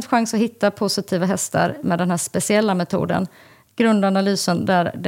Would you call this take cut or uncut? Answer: uncut